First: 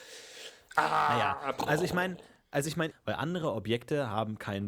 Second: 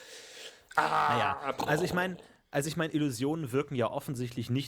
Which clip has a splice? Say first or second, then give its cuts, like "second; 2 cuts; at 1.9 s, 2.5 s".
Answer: first; 1 cut; at 2.9 s